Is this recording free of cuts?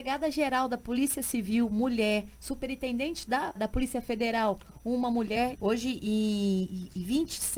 no; 2 cuts; at 3.6 s, 5.5 s

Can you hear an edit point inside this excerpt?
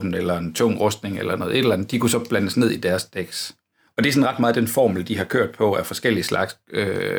no; 0 cuts

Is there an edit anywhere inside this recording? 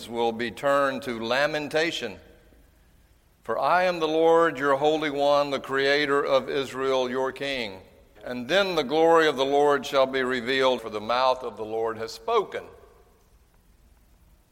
yes; 2 cuts; at 8.2 s, 10.8 s

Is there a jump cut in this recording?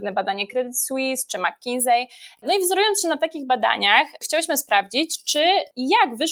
no; 0 cuts

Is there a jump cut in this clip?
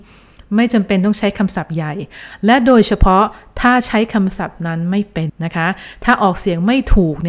yes; 1 cut; at 5.3 s

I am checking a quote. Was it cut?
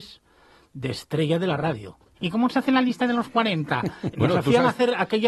yes; 2 cuts; at 2.2 s, 4.1 s

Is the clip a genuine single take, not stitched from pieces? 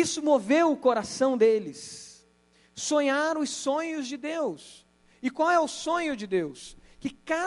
yes; 0 cuts

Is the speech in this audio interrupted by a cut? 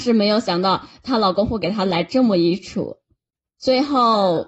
no; 0 cuts

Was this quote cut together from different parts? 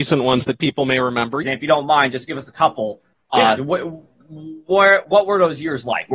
yes; 2 cuts; at 1.4 s, 3.6 s

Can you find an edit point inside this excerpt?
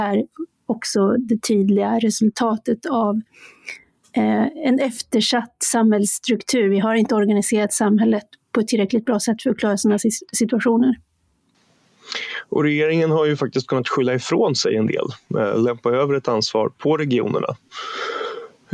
no; 0 cuts

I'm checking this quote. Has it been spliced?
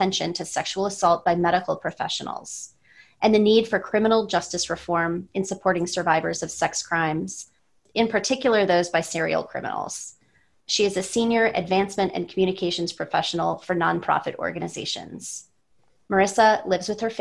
yes; 1 cut; at 10.6 s

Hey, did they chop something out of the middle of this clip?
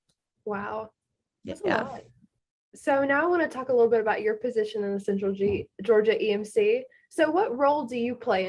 no; 0 cuts

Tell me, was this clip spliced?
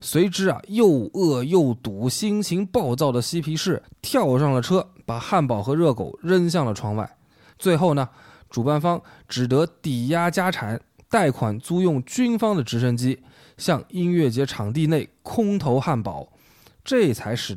yes; 1 cut; at 7.5 s

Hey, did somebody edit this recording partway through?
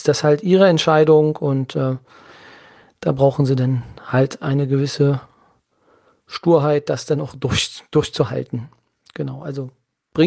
no; 0 cuts

